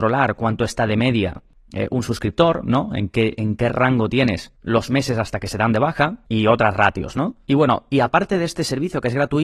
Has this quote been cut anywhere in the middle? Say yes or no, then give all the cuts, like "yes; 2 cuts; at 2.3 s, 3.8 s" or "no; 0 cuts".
no; 0 cuts